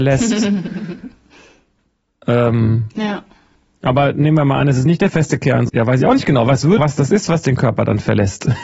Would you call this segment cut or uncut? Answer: cut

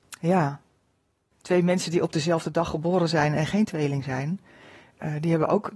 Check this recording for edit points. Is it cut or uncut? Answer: uncut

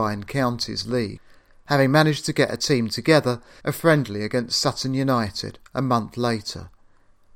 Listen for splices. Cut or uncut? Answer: cut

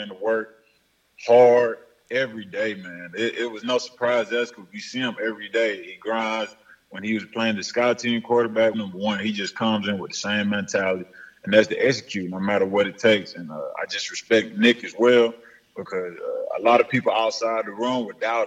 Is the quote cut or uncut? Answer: cut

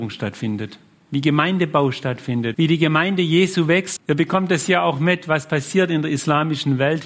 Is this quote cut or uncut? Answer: cut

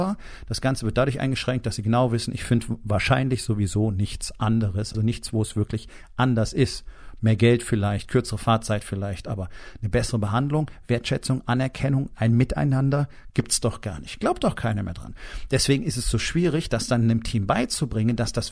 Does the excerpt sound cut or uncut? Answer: cut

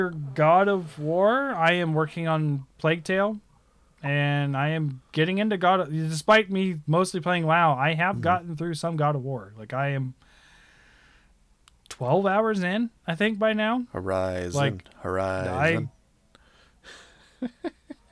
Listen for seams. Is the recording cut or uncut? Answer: cut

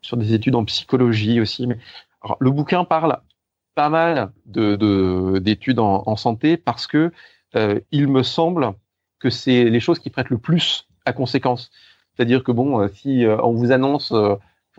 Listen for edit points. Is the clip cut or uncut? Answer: uncut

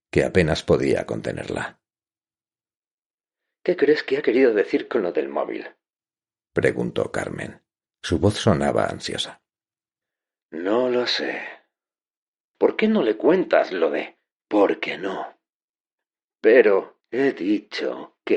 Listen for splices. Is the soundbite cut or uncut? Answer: uncut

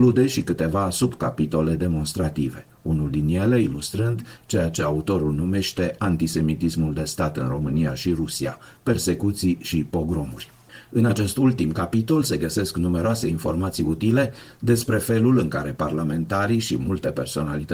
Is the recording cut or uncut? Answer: uncut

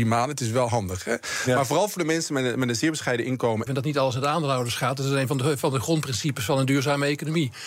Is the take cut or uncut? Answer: cut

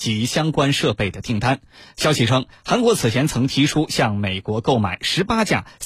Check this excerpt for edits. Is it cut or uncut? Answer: uncut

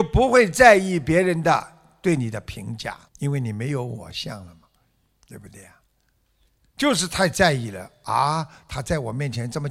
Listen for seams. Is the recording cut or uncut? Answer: cut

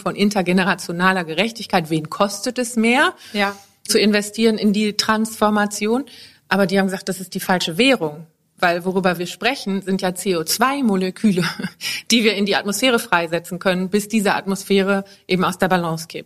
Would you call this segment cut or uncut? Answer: uncut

